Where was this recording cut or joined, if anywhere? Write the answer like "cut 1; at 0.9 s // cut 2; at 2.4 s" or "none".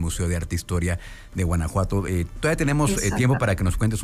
none